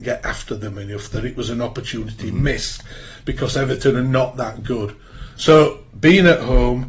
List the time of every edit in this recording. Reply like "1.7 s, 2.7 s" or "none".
5.4 s